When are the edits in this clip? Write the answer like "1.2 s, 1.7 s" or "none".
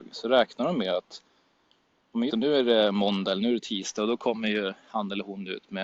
2.3 s